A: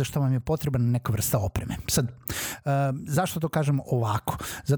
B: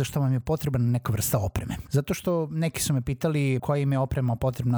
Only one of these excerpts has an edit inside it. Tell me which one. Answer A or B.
B